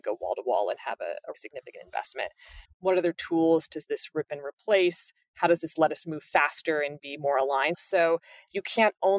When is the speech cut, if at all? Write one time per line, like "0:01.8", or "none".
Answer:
0:01.3
0:02.6
0:07.7